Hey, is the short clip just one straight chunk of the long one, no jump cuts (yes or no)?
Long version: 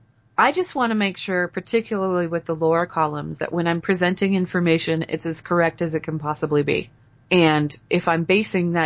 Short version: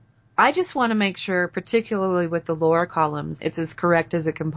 no